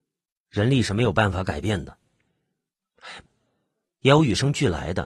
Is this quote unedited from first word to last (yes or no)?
no